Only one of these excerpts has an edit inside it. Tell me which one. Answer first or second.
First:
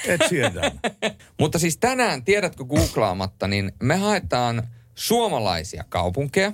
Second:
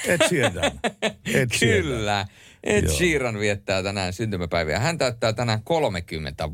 first